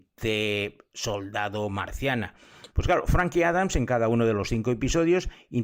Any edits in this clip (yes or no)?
yes